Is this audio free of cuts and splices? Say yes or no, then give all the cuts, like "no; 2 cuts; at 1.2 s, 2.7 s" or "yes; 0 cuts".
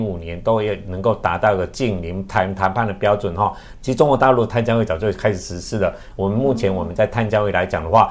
no; 2 cuts; at 3.8 s, 6.1 s